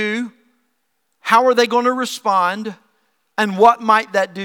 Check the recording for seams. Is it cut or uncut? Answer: uncut